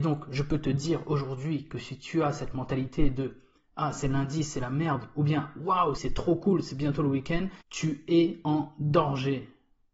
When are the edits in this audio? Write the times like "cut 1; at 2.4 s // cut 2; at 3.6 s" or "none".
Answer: cut 1; at 6.0 s // cut 2; at 7.6 s